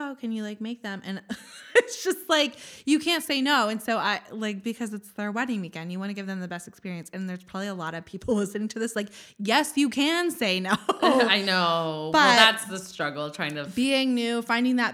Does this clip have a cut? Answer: no; 0 cuts

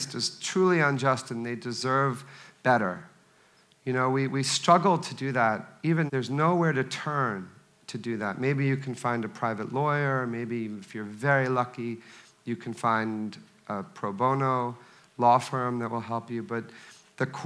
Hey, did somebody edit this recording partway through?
yes; 1 cut; at 6.1 s

